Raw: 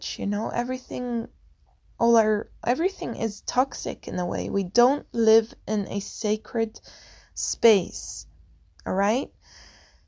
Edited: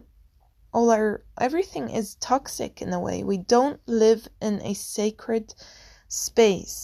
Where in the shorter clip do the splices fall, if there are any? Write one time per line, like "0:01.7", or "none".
none